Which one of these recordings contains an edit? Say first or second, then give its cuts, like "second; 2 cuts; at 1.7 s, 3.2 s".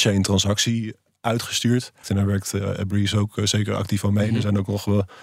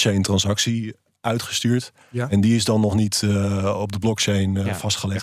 first; 1 cut; at 2.0 s